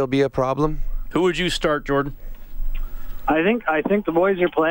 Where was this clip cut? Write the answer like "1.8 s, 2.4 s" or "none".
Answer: 1.1 s